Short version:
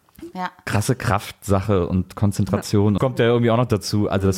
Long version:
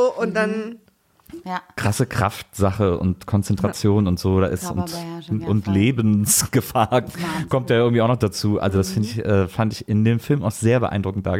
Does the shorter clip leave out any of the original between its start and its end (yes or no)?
yes